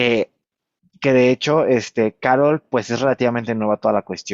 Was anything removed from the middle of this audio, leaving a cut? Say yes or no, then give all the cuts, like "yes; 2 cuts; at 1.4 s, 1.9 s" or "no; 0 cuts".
no; 0 cuts